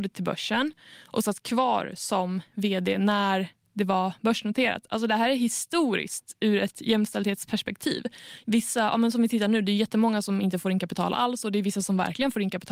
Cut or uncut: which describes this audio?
cut